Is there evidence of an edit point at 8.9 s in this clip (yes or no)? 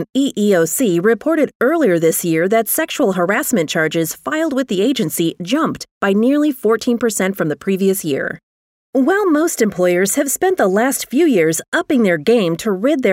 no